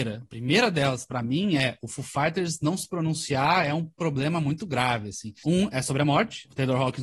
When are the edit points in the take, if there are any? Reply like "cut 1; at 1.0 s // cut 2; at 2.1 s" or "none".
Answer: cut 1; at 5.4 s